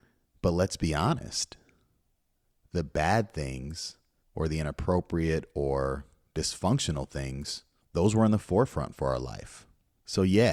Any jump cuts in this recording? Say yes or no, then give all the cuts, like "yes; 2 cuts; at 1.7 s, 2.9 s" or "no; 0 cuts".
no; 0 cuts